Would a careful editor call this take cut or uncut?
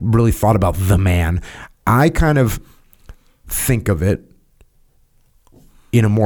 uncut